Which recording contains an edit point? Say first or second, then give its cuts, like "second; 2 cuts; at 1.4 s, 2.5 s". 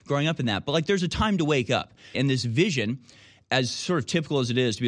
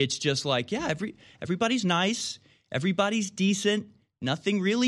first; 1 cut; at 2.1 s